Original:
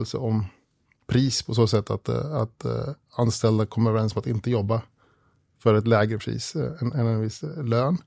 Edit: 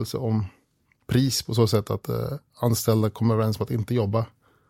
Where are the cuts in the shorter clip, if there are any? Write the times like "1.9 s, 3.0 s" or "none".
2.0 s

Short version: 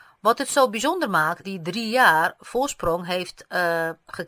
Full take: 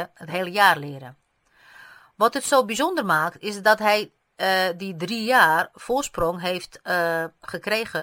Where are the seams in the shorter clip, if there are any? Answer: 1.4 s

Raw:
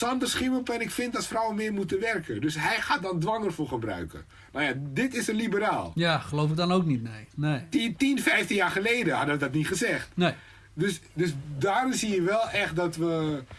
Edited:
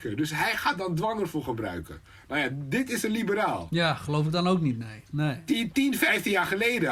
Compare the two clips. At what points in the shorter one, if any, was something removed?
none

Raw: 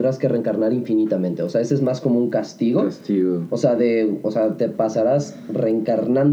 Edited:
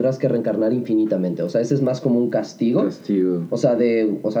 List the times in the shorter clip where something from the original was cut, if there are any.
none

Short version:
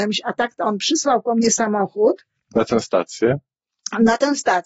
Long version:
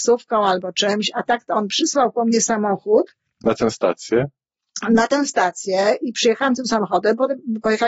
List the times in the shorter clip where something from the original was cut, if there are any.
none

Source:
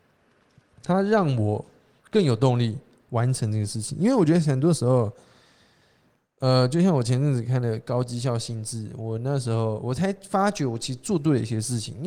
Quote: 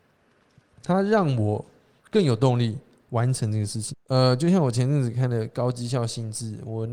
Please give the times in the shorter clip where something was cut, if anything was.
3.9 s

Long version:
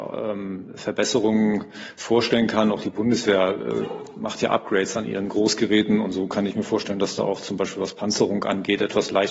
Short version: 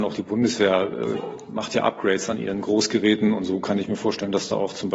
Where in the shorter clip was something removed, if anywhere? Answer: none

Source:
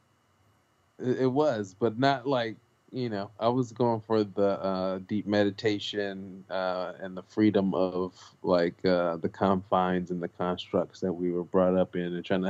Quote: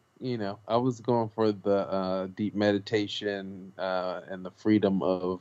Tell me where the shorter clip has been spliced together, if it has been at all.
none

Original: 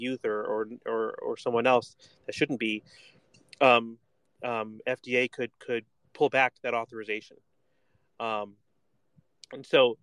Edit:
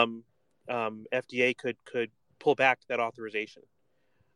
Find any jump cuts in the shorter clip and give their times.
none

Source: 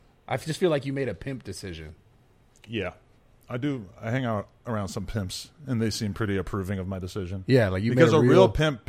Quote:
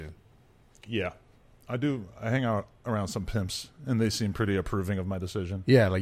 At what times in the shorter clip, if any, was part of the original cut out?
none

